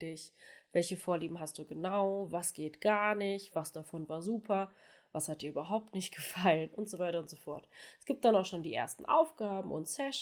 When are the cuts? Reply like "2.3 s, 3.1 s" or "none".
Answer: 3.5 s